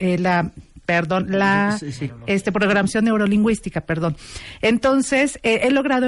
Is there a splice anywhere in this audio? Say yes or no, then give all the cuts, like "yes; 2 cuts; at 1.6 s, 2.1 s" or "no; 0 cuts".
no; 0 cuts